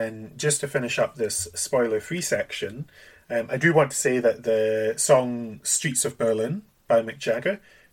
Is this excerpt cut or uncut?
uncut